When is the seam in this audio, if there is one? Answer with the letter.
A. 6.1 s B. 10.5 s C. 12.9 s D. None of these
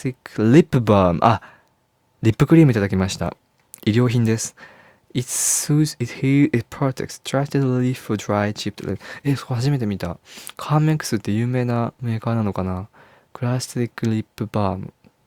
D